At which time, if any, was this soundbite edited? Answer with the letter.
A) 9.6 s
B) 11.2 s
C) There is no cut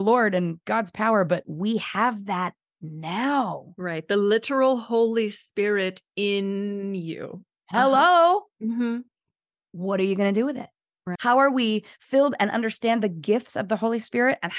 B